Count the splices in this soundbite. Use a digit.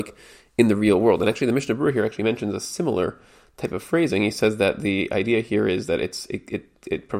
0